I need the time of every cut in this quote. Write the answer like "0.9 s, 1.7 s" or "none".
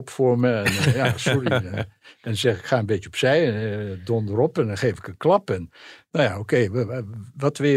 none